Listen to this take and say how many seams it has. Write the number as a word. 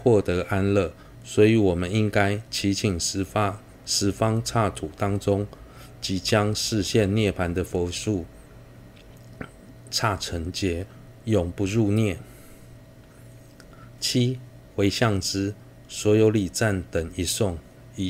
zero